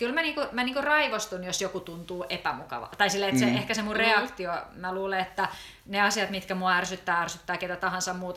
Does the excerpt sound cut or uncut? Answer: uncut